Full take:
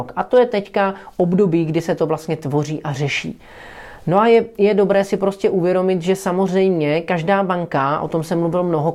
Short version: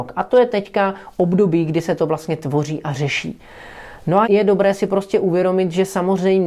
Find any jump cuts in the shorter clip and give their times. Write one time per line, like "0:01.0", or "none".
0:04.2